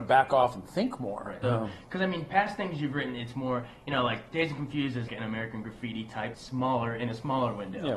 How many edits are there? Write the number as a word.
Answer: three